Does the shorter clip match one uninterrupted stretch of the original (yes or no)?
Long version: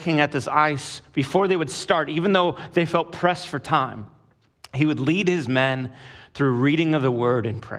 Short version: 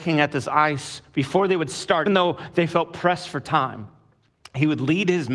no